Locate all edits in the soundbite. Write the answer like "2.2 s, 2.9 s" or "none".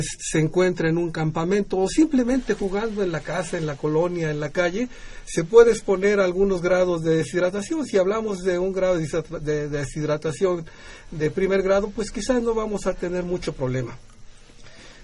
none